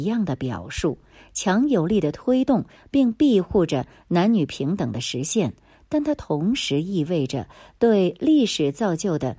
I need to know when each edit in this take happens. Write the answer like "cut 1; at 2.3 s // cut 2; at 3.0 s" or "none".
none